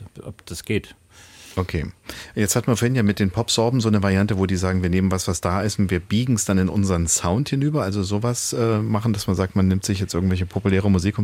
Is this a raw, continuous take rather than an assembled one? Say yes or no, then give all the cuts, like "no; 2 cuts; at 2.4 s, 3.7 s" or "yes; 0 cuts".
yes; 0 cuts